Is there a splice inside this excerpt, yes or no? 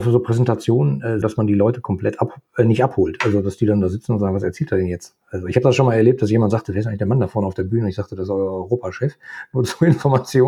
yes